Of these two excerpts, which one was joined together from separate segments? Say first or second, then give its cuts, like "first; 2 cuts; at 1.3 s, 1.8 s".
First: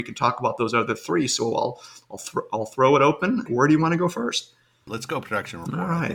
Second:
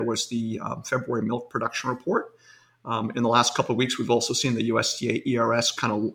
first; 2 cuts; at 3.5 s, 4.9 s